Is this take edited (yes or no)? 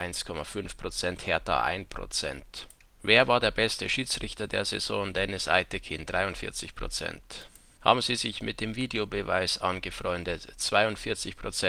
no